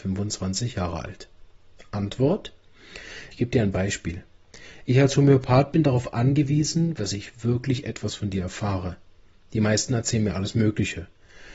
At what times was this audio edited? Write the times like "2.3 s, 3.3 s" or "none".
3.3 s, 7.0 s